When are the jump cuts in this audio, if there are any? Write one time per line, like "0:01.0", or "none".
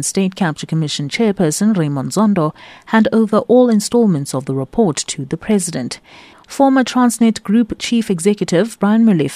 0:06.3